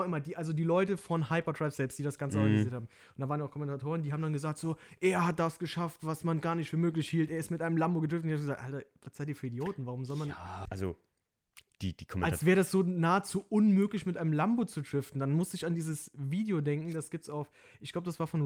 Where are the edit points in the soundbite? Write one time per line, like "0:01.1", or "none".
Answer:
0:10.7